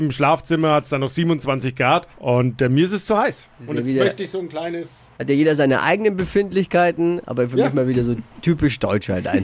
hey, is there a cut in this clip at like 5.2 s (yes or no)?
no